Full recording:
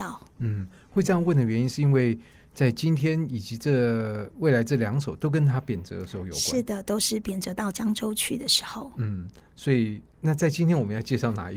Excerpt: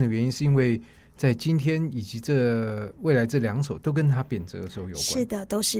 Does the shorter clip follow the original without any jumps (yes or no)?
yes